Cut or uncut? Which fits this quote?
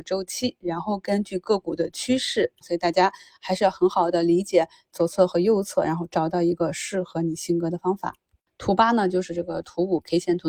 cut